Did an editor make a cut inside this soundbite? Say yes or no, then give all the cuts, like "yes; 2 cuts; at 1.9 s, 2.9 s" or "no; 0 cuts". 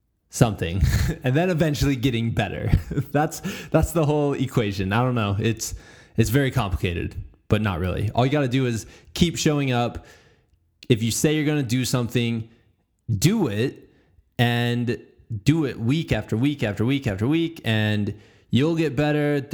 no; 0 cuts